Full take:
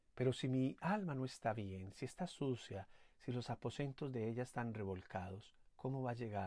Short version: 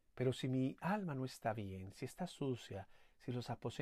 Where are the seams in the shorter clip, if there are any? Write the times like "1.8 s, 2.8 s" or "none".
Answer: none